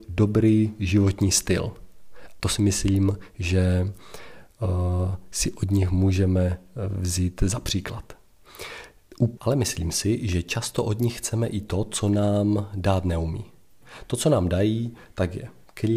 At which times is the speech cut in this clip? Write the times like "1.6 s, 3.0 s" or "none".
2.4 s, 9.4 s

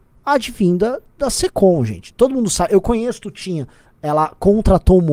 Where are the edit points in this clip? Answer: 2.1 s, 3.8 s

